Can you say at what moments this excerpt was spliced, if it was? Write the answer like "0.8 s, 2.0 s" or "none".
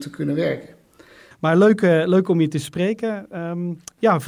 1.3 s